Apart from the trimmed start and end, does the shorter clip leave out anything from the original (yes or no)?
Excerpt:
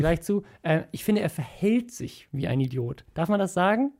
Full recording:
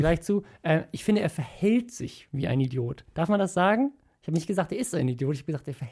no